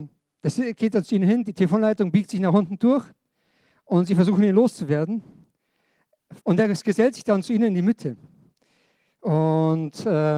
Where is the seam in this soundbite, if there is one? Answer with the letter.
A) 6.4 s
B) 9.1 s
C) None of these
A